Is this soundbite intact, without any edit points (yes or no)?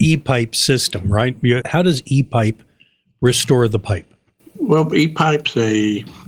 no